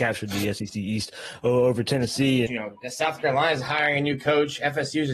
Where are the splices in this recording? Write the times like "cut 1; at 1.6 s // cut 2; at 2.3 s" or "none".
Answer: cut 1; at 2.5 s